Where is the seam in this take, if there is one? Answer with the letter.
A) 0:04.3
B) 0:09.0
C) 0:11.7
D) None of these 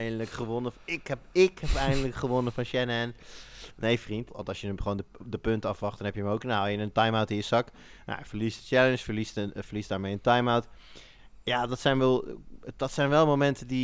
A